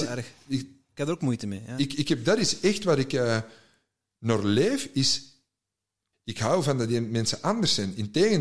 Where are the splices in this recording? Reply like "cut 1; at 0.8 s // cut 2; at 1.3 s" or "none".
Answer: cut 1; at 6.1 s